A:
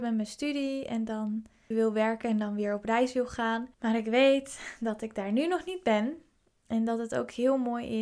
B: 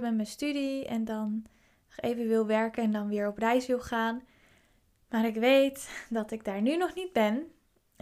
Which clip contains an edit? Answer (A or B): A